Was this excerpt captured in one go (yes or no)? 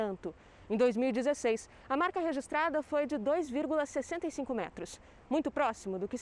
yes